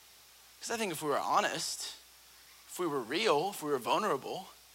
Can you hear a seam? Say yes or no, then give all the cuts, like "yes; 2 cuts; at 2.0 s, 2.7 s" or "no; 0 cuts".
no; 0 cuts